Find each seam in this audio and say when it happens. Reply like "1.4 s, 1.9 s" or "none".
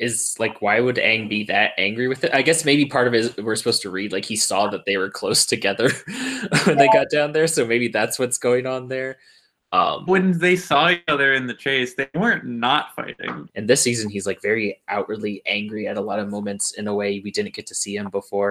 10.1 s, 13.5 s